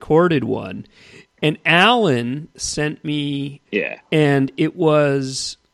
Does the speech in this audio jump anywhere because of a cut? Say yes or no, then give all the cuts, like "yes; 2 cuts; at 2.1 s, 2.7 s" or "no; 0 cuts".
yes; 1 cut; at 3.6 s